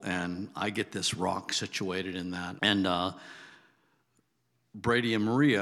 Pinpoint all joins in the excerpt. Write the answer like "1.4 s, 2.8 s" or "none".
2.6 s